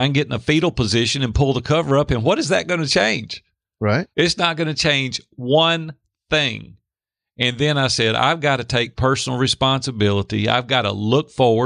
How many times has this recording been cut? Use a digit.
1